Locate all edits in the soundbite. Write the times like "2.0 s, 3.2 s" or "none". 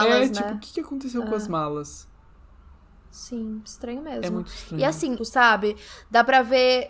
5.2 s